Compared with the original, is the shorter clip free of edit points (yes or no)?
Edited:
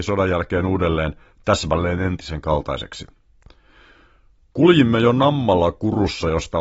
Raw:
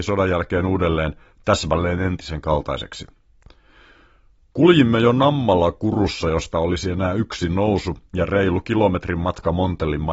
yes